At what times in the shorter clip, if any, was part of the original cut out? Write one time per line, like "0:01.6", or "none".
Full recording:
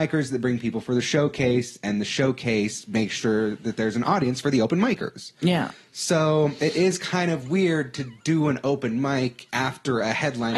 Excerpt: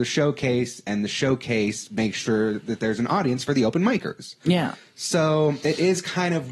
none